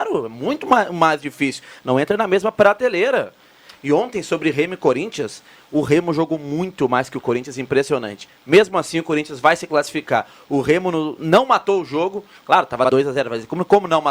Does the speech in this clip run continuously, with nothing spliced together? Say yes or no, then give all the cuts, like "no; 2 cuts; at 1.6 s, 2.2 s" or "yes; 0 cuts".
yes; 0 cuts